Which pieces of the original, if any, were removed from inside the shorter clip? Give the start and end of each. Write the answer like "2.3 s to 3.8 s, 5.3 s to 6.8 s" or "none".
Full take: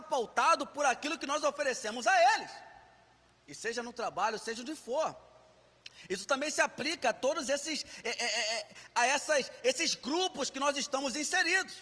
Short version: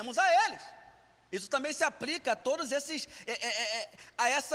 3.2 s to 6.1 s